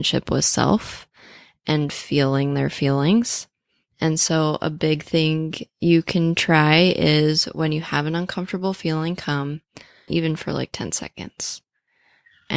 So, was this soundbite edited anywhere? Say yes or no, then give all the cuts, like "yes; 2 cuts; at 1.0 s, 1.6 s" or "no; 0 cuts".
yes; 1 cut; at 10.1 s